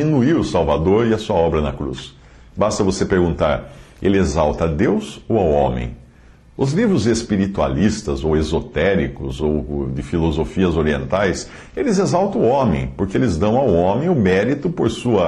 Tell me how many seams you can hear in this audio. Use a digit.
2